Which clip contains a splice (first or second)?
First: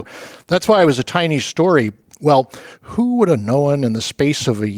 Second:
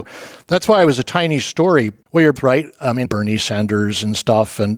second